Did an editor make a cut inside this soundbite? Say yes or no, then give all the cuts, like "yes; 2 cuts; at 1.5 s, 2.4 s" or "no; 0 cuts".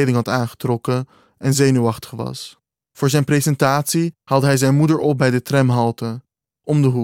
yes; 2 cuts; at 2.7 s, 4.2 s